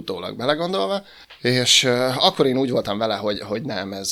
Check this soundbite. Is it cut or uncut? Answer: uncut